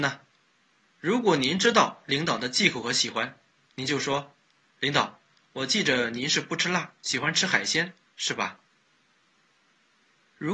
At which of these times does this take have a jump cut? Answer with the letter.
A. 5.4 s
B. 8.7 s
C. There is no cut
B